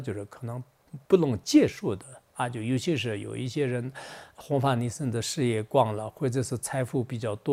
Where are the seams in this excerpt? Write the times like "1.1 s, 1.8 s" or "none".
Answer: 1.0 s